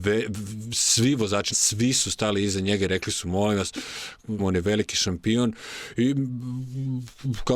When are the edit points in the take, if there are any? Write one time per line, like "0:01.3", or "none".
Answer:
0:01.5
0:04.4